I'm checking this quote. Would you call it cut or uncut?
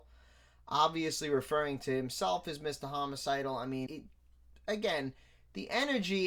cut